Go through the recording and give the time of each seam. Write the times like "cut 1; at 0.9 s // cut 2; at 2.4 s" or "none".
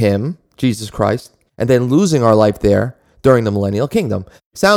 cut 1; at 1.5 s